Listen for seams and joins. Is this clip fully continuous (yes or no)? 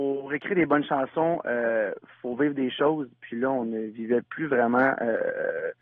yes